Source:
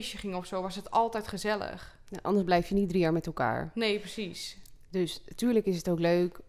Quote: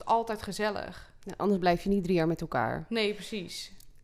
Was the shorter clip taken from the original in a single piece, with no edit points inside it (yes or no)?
yes